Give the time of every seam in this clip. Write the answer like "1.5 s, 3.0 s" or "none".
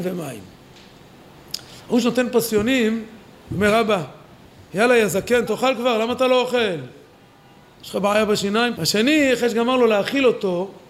5.5 s, 8.8 s